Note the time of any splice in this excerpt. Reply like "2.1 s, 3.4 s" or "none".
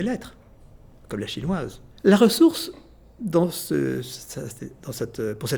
2.0 s

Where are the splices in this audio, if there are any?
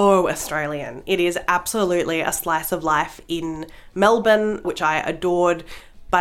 4.6 s

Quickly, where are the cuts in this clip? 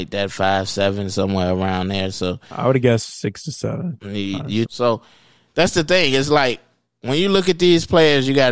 4.7 s

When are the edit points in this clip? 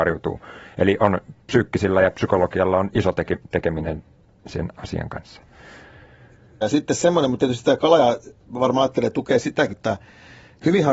6.6 s, 9.7 s

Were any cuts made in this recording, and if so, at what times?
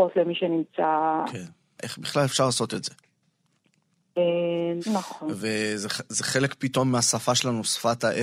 1.8 s, 4.8 s

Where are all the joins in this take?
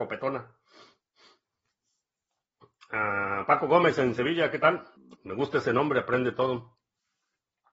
5.1 s

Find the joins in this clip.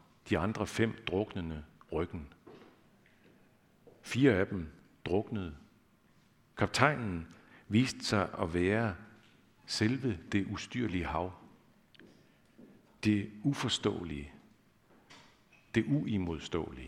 none

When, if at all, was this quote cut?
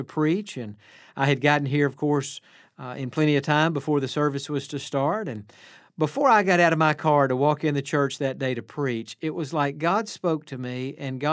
none

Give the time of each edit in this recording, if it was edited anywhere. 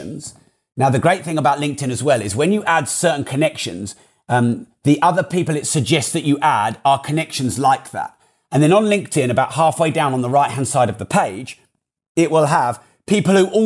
none

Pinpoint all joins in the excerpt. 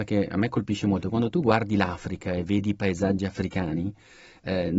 none

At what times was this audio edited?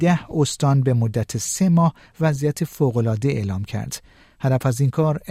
none

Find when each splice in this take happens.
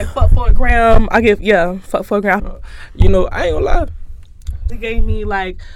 2.4 s, 4.7 s

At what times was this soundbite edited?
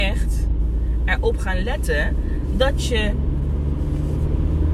none

